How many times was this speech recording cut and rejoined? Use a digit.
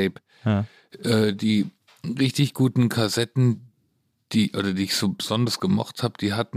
0